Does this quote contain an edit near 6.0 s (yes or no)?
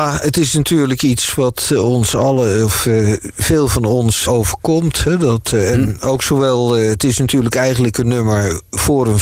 no